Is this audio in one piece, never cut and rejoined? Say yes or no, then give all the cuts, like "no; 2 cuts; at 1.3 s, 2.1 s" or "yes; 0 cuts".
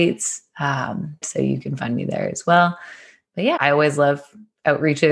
no; 2 cuts; at 1.2 s, 3.6 s